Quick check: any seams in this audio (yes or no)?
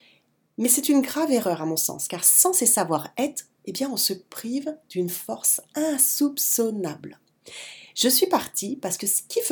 no